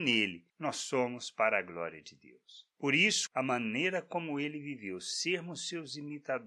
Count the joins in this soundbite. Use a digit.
1